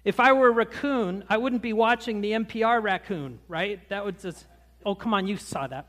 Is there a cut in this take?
no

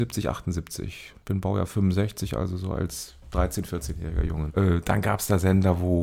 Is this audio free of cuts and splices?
no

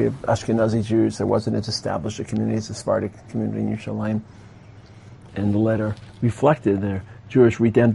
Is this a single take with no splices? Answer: no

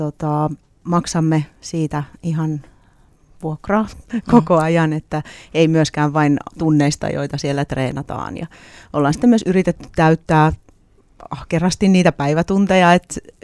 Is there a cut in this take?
no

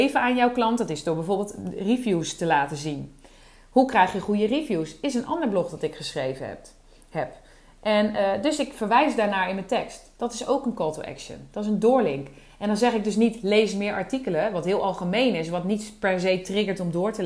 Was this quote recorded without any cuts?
yes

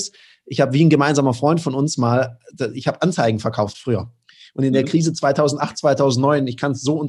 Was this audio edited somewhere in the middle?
no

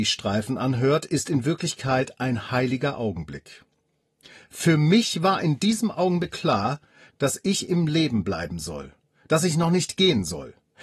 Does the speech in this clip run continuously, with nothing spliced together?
no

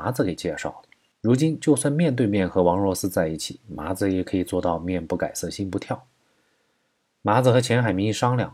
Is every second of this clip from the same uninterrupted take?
no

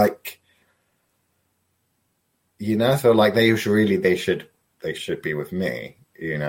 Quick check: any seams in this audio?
no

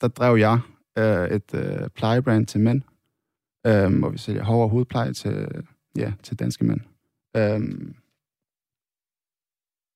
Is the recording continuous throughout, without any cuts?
yes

